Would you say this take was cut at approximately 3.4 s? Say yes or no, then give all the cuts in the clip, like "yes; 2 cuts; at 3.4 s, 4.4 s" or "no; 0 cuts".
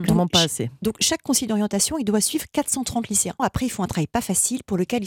yes; 1 cut; at 3.4 s